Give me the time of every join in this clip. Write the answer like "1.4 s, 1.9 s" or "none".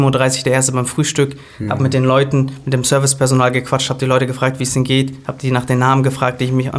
none